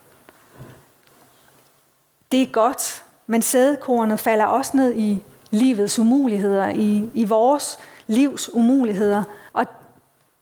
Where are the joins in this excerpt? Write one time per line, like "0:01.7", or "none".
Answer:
0:09.5